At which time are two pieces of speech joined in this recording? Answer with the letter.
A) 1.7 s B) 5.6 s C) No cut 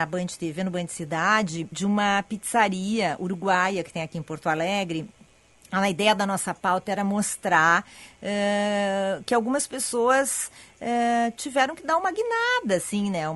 A